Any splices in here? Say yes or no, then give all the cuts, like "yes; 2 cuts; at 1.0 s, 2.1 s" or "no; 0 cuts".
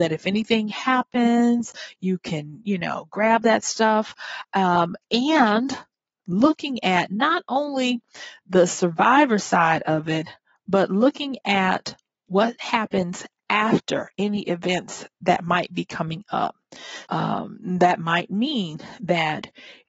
yes; 1 cut; at 17.1 s